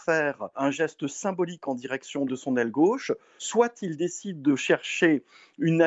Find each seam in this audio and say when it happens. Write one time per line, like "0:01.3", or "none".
none